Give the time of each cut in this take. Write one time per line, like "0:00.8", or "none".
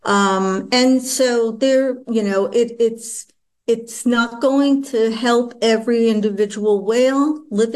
none